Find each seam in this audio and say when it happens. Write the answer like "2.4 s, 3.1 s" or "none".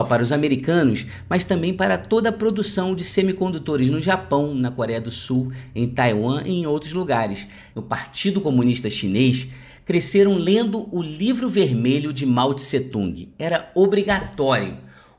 7.7 s